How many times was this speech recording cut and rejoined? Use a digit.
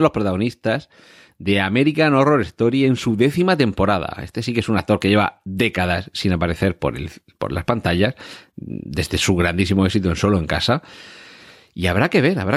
0